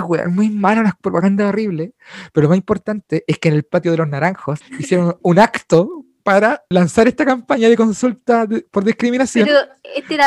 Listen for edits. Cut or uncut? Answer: cut